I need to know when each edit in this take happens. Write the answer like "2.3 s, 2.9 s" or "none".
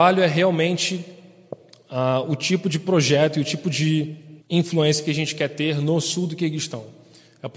4.4 s

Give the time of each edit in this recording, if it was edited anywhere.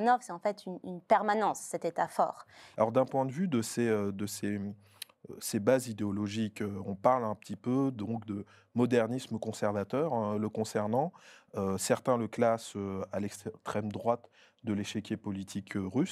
2.7 s

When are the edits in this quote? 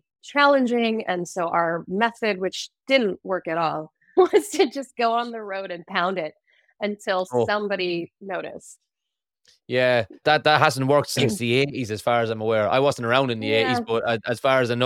10.2 s

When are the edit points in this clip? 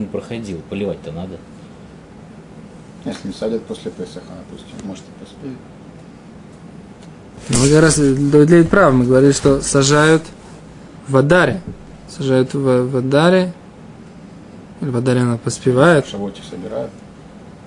4.8 s, 11.0 s

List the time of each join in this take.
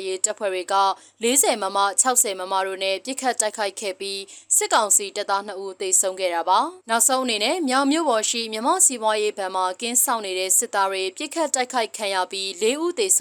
6.8 s

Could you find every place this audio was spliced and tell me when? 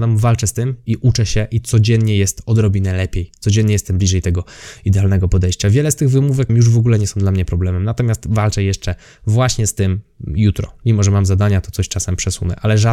6.5 s

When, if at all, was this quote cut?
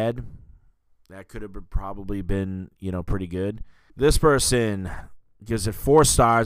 3.9 s

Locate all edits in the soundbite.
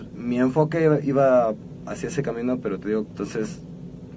3.1 s

